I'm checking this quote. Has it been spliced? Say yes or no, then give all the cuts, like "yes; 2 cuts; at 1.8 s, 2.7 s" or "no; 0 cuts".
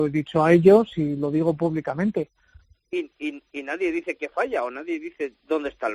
yes; 1 cut; at 2.7 s